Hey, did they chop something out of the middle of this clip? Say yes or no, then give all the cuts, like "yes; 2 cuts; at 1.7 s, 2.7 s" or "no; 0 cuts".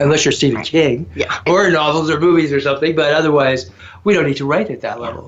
yes; 1 cut; at 1.5 s